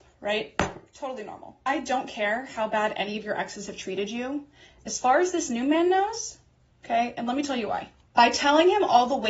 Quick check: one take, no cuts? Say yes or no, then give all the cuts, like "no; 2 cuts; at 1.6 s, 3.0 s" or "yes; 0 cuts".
no; 1 cut; at 6.7 s